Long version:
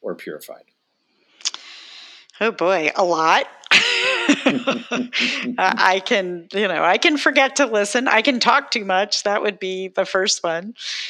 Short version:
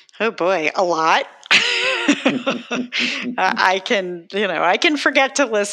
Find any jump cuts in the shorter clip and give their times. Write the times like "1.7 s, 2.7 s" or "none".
none